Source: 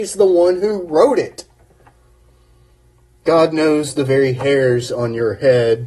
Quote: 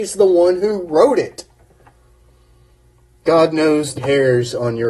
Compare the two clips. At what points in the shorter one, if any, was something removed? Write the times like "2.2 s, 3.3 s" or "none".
4.0 s